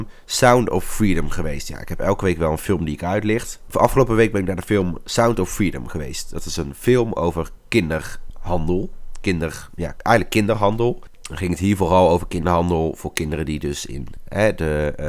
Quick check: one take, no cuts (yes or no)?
no